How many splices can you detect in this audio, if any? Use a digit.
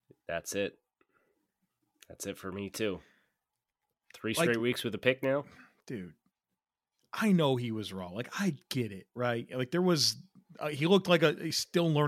0